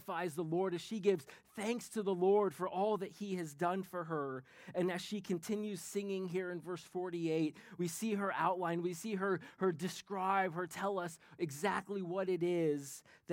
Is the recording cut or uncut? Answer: uncut